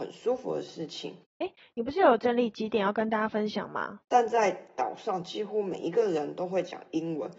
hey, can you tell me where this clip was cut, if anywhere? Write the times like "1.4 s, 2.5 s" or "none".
1.2 s, 4.1 s